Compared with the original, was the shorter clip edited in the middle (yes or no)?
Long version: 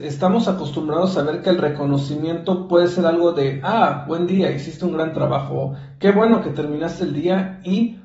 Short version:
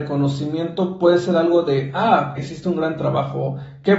yes